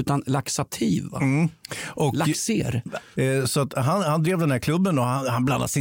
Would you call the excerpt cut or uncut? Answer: cut